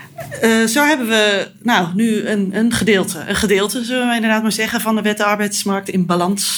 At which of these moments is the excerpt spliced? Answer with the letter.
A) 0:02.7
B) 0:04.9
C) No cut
C